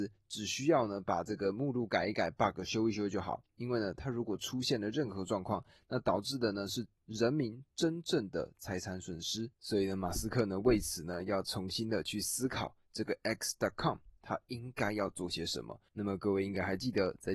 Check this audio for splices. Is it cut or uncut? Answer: uncut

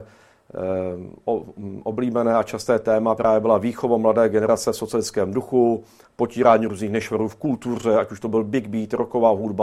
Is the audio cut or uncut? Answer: uncut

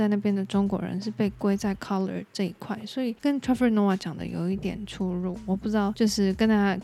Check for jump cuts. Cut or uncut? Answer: uncut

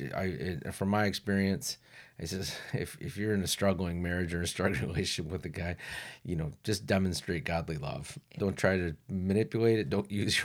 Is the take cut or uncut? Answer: cut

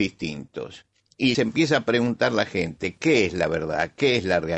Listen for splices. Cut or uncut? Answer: cut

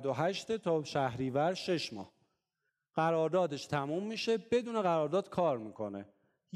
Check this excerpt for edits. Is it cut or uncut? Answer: uncut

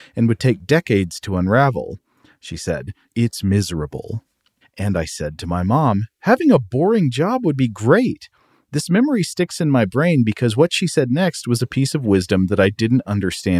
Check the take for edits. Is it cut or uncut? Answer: cut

